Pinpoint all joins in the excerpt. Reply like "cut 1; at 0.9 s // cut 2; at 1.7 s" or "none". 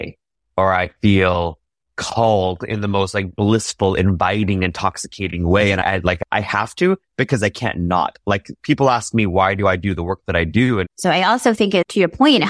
cut 1; at 10.8 s